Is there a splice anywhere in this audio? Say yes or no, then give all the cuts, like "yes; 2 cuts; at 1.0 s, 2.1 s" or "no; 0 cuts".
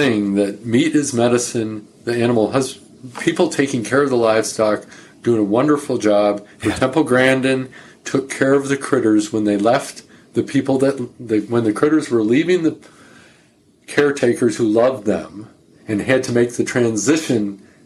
yes; 1 cut; at 6.5 s